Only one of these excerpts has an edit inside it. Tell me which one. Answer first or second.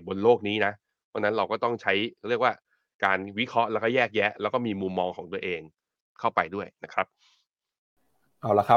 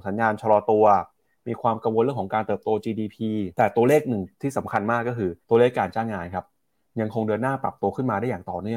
second